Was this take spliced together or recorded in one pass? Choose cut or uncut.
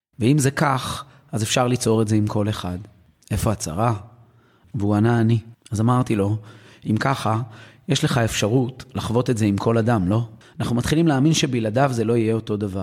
cut